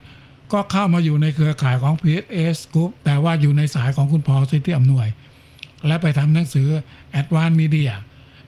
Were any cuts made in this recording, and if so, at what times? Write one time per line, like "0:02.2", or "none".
0:03.0